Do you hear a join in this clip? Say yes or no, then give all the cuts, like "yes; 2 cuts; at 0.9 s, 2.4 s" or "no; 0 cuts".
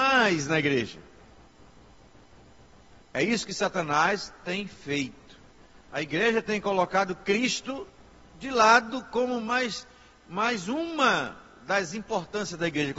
no; 0 cuts